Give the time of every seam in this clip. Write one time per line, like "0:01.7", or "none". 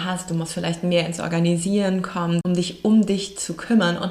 0:02.4